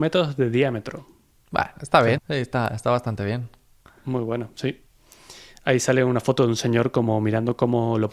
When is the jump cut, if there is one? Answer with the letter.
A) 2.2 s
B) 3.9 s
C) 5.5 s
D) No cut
A